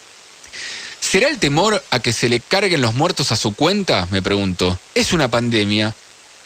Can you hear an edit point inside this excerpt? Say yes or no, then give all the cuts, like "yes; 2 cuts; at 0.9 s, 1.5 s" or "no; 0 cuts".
yes; 1 cut; at 4.9 s